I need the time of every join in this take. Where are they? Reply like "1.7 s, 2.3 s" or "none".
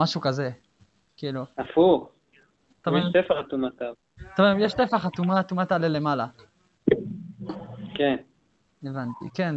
none